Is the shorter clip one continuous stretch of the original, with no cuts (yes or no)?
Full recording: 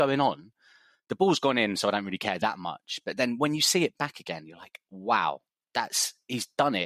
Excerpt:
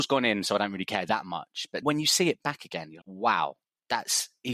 no